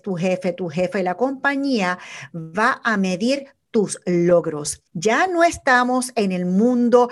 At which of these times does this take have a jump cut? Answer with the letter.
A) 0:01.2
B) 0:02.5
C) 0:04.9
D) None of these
C